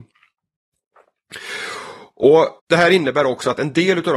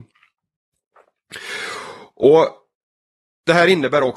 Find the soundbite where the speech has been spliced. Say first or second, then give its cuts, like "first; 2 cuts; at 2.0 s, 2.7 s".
first; 1 cut; at 2.6 s